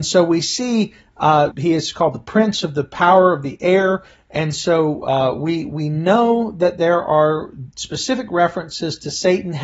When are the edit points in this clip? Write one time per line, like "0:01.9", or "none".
0:01.5